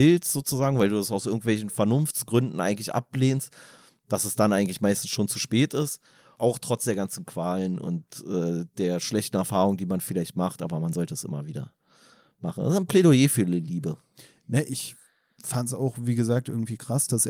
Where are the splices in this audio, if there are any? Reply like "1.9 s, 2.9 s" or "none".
6.4 s